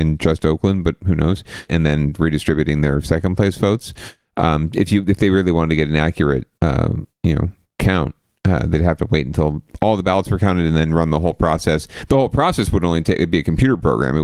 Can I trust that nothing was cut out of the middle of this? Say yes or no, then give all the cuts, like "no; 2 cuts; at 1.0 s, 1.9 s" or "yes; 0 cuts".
no; 2 cuts; at 1.7 s, 6.6 s